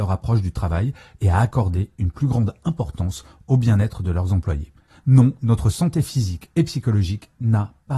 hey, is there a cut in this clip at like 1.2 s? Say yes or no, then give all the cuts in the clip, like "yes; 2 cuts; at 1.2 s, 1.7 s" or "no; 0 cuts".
no; 1 cut; at 4.9 s